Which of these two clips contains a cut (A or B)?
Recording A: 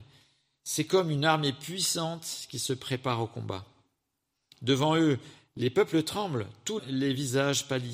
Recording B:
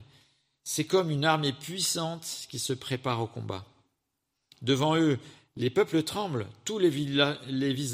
A